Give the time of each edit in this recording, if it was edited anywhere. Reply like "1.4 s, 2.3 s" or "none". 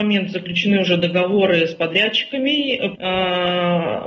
2.9 s